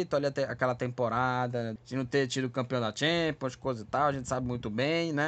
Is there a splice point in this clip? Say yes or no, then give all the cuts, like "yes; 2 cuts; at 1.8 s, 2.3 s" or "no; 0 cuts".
yes; 1 cut; at 1.8 s